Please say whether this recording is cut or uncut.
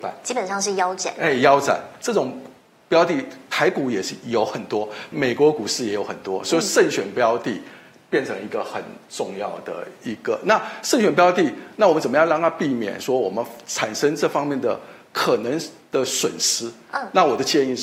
cut